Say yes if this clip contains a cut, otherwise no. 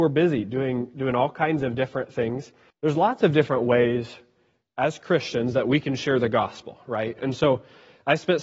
yes